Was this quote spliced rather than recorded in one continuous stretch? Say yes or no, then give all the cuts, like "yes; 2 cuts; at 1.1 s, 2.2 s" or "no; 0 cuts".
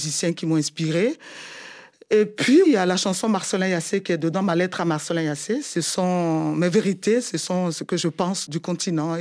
yes; 1 cut; at 2.6 s